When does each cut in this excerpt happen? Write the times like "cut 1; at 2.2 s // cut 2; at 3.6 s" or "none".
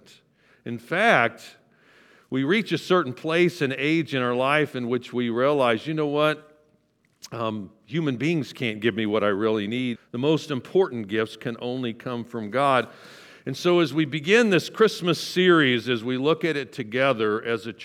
cut 1; at 10.0 s